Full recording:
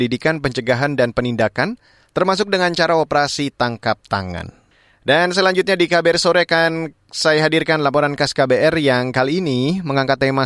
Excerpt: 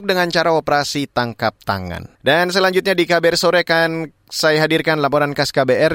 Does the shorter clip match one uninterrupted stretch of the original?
no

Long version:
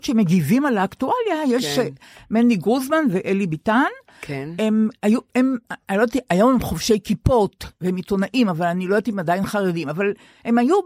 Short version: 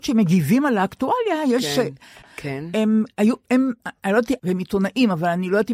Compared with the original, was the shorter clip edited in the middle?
yes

